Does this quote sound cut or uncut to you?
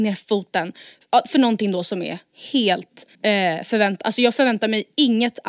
cut